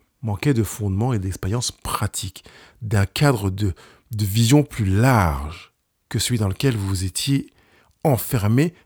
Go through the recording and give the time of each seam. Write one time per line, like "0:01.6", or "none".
none